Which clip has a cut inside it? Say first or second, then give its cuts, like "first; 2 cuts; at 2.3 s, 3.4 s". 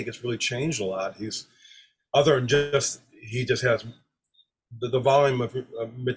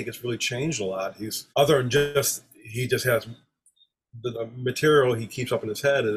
second; 2 cuts; at 1.5 s, 4.3 s